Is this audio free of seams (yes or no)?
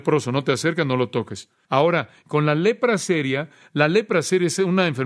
yes